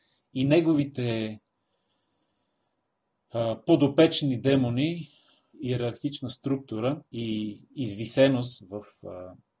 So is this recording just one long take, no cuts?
no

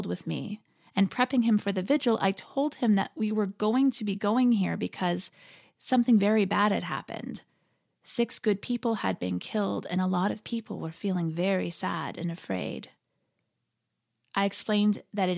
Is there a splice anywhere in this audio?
no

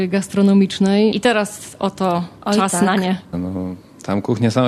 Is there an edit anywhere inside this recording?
yes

